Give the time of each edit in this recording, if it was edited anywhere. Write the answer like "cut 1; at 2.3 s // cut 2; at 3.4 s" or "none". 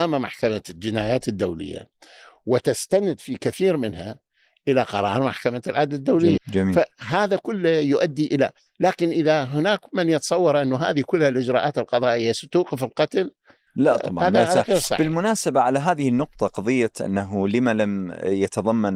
cut 1; at 6.4 s